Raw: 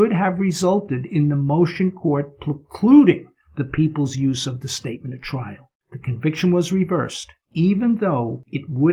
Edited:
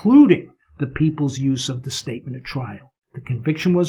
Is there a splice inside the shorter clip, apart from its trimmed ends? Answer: no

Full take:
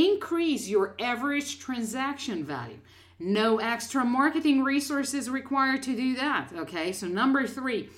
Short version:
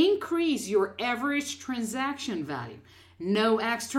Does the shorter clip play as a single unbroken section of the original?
yes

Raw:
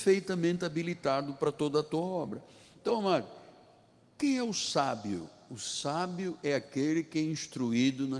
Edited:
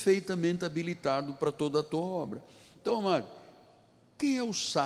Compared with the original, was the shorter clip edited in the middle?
no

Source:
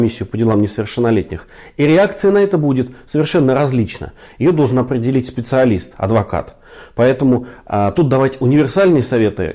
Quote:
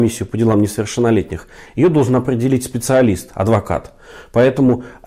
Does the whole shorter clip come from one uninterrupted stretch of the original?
no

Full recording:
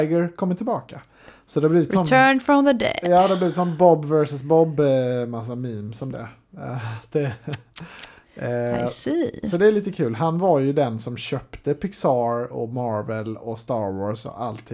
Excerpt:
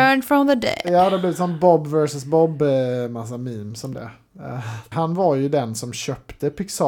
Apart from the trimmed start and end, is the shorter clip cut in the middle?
yes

